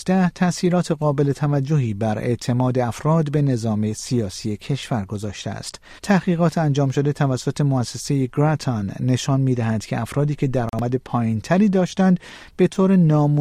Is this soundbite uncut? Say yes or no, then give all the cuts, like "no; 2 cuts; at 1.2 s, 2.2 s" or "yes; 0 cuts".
no; 1 cut; at 6.0 s